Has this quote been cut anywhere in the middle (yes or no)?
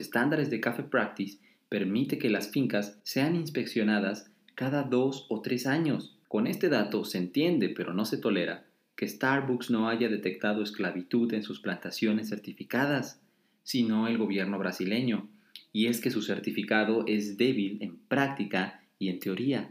no